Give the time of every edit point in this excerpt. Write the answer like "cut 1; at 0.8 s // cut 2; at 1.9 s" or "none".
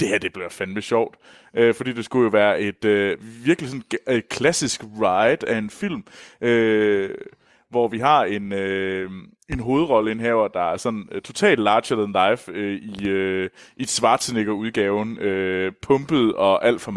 none